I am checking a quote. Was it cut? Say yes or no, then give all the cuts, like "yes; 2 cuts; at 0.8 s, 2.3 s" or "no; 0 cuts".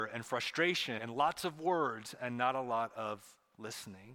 yes; 1 cut; at 1.0 s